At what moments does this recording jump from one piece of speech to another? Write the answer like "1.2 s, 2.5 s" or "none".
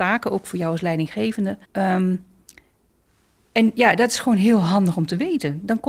1.6 s